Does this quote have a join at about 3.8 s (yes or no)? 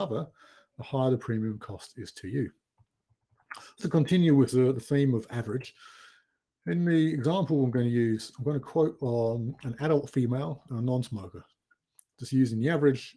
yes